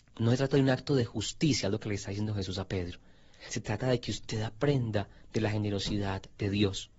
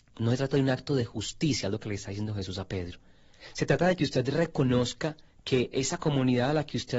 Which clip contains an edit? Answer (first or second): second